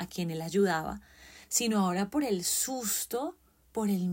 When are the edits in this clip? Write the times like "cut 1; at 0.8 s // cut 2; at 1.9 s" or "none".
none